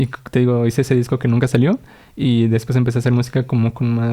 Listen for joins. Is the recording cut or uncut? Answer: uncut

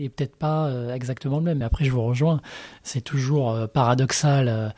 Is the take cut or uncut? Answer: uncut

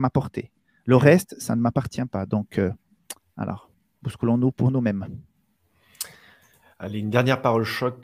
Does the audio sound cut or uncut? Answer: uncut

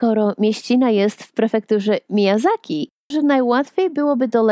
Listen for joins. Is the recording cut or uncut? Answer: cut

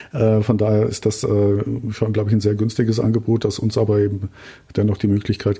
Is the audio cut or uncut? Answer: uncut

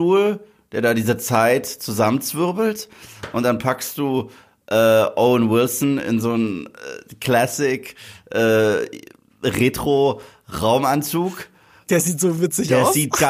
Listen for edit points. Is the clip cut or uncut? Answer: uncut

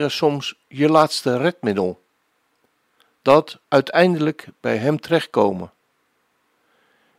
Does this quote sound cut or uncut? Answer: cut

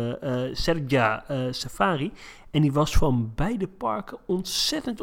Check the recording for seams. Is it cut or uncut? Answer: uncut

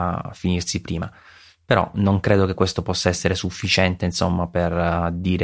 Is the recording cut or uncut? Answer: uncut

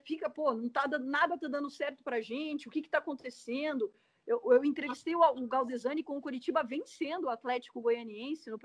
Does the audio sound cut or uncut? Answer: uncut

